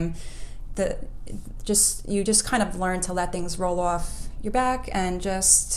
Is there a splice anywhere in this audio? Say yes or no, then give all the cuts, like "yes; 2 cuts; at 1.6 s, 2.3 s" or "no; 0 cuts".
no; 0 cuts